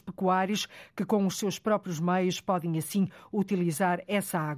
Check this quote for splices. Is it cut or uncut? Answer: uncut